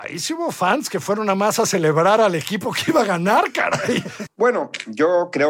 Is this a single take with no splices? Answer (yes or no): no